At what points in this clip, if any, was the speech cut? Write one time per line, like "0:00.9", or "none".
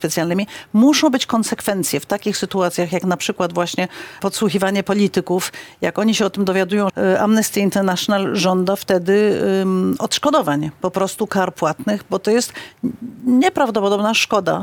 0:04.2
0:06.9

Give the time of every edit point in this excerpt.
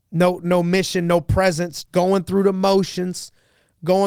0:01.8

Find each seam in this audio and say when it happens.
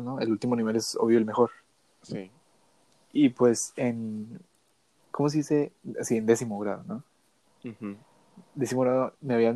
none

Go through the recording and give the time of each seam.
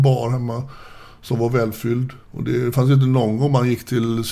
0:02.2

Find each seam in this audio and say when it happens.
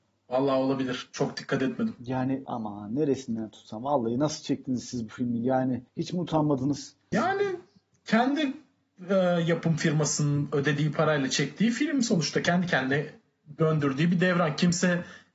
0:05.9
0:07.1

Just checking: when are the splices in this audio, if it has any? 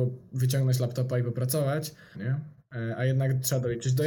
0:02.1

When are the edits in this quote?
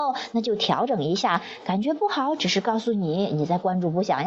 none

